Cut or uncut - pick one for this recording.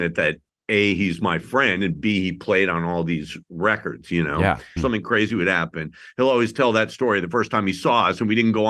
cut